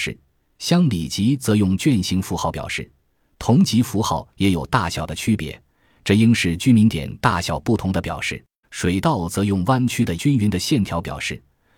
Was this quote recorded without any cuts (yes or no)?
no